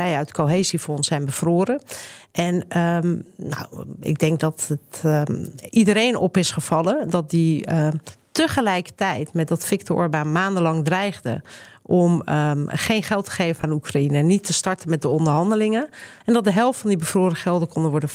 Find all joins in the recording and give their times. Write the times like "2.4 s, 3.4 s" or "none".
16.2 s